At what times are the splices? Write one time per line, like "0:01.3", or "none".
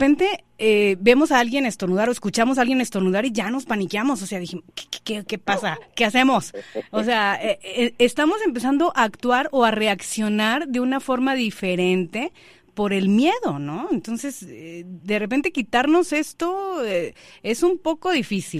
none